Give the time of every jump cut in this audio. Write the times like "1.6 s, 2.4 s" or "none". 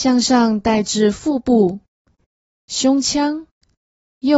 none